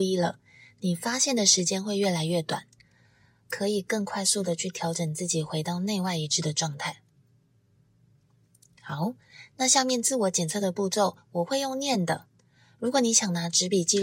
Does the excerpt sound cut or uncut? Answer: uncut